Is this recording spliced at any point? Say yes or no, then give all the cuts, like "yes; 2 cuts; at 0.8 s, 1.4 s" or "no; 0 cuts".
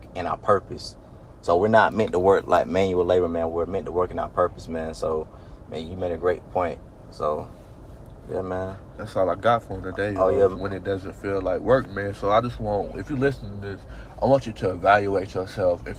no; 0 cuts